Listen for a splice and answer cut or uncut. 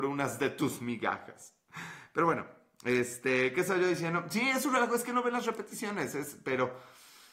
uncut